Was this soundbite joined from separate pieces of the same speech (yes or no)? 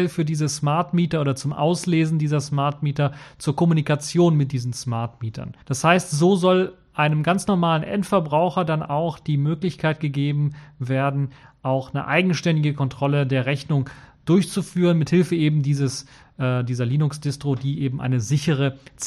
yes